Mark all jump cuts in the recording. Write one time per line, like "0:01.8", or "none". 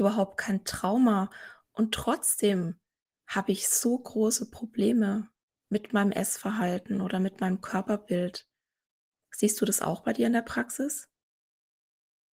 none

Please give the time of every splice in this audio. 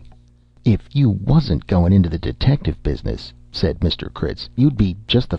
none

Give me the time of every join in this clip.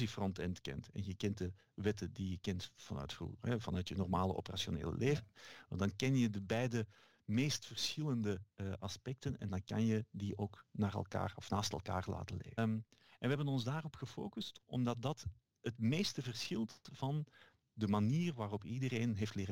0:12.6

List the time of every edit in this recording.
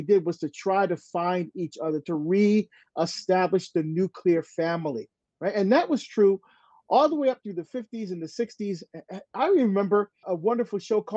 0:10.2

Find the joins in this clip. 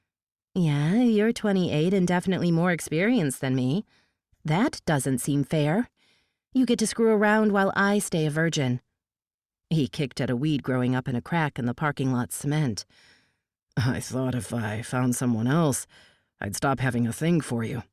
none

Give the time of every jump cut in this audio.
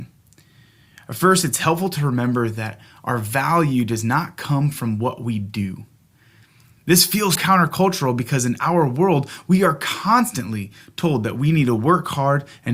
0:07.4

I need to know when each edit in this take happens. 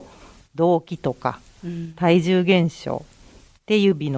none

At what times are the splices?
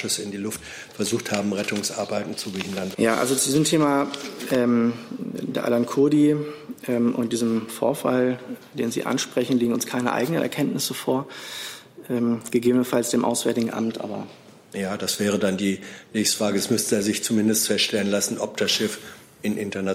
0:02.9

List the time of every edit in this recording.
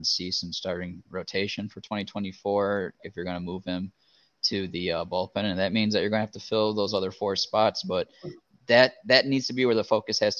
0:03.0

